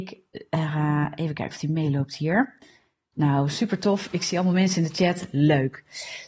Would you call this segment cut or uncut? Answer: uncut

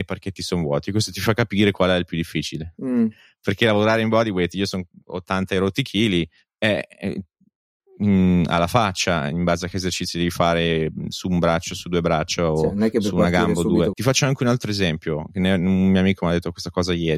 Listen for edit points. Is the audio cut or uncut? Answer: cut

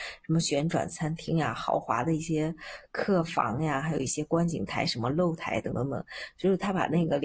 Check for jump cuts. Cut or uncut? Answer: cut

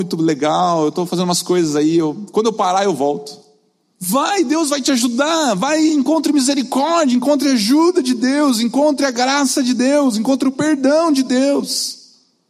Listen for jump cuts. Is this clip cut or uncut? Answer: cut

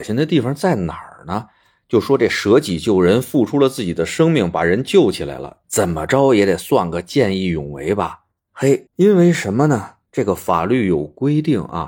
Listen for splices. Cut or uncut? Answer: cut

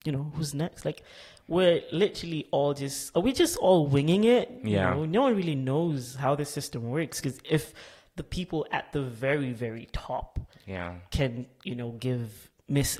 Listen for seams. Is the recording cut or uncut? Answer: uncut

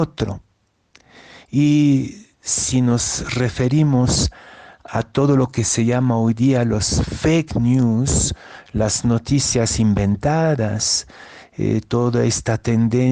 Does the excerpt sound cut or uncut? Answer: uncut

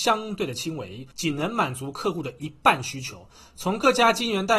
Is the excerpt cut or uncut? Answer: cut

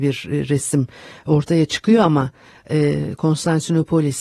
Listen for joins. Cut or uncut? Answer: uncut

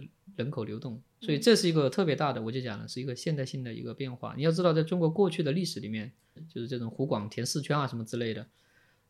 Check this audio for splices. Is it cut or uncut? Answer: cut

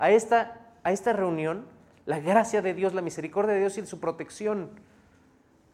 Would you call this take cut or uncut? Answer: uncut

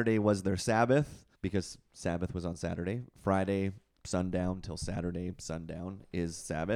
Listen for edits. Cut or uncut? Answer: cut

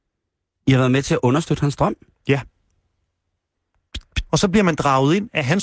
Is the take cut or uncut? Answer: cut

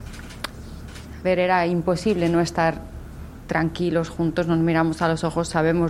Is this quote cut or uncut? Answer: uncut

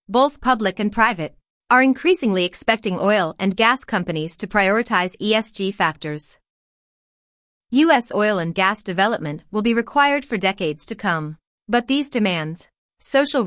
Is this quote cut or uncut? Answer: uncut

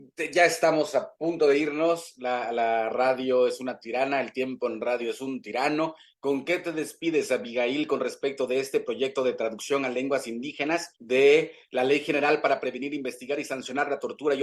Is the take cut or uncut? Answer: uncut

